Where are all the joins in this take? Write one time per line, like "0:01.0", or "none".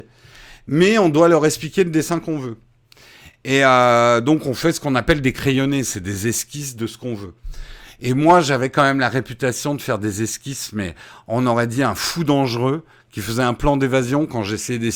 none